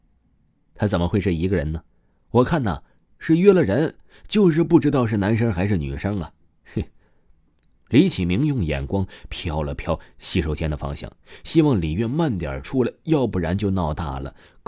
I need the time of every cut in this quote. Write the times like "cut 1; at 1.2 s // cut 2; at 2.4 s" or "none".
none

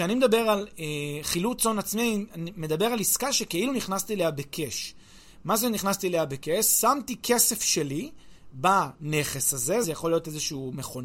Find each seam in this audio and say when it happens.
cut 1; at 9.8 s

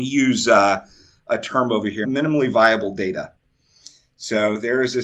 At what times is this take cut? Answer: cut 1; at 2.0 s

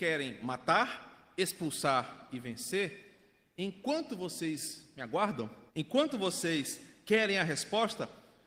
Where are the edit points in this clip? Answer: cut 1; at 5.7 s

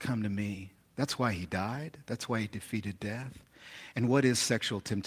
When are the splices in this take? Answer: none

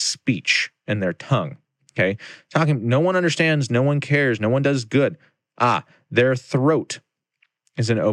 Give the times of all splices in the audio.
cut 1; at 3.7 s

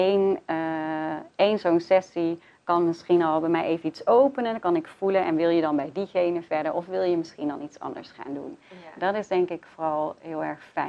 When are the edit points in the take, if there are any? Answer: none

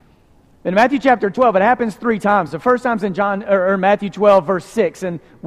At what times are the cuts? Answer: none

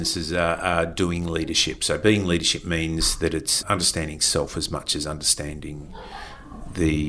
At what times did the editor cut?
cut 1; at 1.8 s // cut 2; at 3.6 s

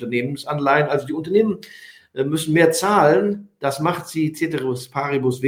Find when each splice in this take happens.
none

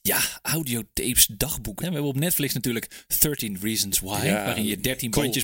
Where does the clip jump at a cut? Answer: cut 1; at 1.8 s

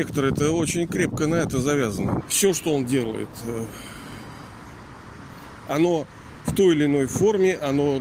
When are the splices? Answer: cut 1; at 2.2 s

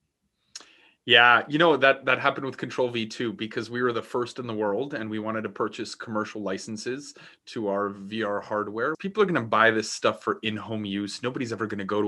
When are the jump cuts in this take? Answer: cut 1; at 8.9 s

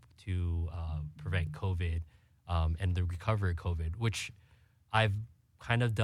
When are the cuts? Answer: none

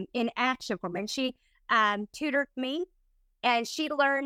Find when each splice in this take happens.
cut 1; at 1.0 s

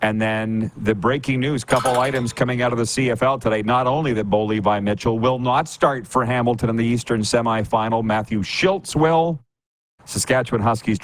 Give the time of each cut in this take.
cut 1; at 10.0 s

